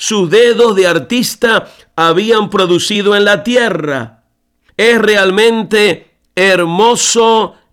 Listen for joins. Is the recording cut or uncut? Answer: cut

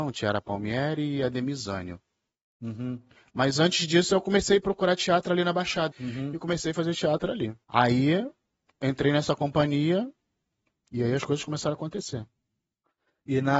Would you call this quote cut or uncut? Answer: cut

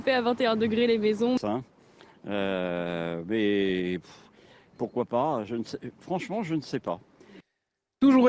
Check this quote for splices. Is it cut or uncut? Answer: cut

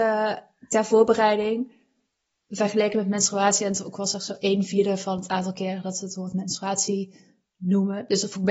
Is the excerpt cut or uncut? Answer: uncut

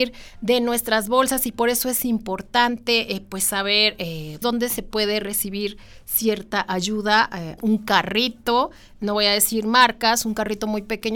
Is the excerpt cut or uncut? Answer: cut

